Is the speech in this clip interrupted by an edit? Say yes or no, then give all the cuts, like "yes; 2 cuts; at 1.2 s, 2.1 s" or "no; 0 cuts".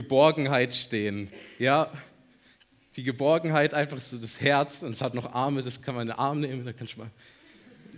no; 0 cuts